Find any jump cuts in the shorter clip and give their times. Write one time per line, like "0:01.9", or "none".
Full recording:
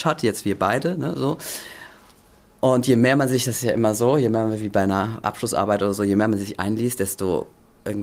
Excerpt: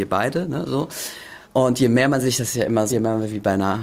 0:01.4
0:02.9